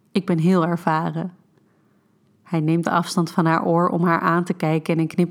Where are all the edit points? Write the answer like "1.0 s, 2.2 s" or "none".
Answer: 2.8 s